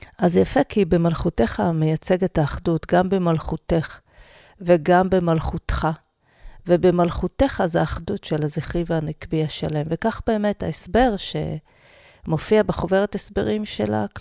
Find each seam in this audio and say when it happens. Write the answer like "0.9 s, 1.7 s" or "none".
none